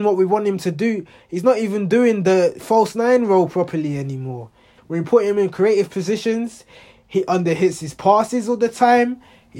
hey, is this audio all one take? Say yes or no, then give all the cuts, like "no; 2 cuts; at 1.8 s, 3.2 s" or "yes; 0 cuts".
no; 1 cut; at 4.8 s